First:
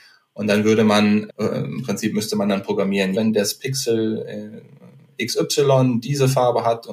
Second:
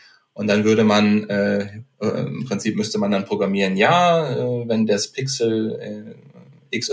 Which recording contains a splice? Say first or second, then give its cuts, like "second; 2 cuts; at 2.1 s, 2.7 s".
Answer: first; 2 cuts; at 1.3 s, 3.1 s